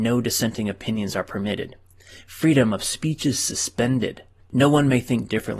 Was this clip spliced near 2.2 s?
no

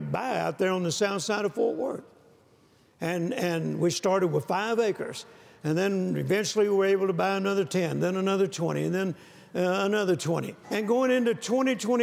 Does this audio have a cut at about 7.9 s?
no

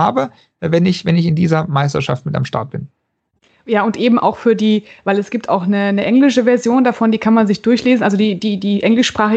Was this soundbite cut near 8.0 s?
no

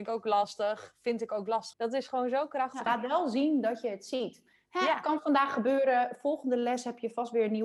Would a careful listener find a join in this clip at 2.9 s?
yes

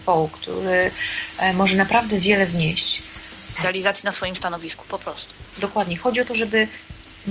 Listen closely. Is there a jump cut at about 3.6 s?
yes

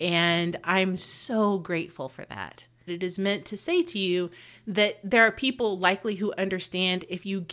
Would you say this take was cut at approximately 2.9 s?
yes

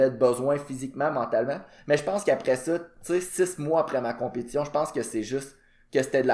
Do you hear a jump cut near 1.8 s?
no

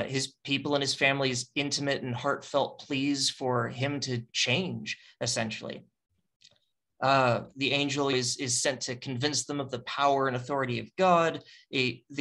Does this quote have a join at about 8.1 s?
yes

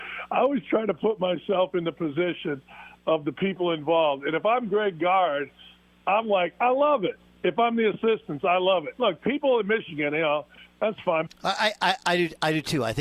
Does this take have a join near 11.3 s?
yes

